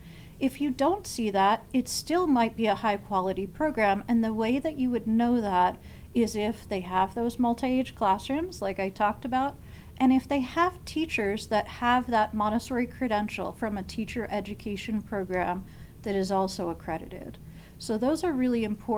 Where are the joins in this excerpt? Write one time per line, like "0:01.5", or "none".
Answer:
none